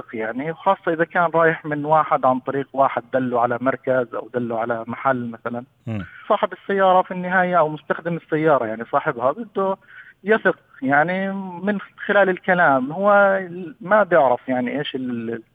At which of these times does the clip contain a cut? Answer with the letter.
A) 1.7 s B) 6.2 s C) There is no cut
B